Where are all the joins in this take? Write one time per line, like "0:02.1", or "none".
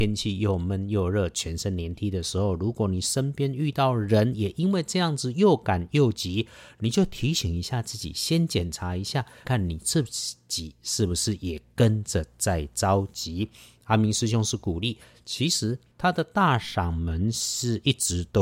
0:01.9
0:09.4
0:15.9